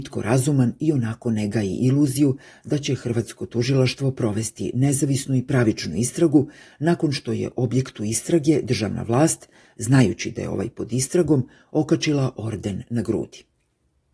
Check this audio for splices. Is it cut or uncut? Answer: uncut